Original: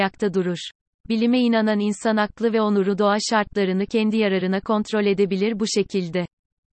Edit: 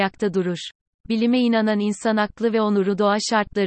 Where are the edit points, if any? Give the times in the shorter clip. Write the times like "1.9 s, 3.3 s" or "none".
none